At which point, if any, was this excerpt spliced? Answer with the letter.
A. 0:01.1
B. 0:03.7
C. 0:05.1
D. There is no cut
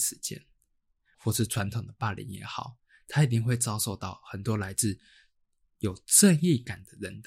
A